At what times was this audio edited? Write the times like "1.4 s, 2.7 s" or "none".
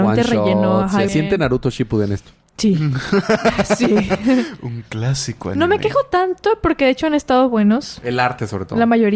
1.1 s